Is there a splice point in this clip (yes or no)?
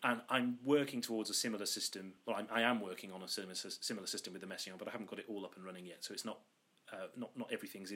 no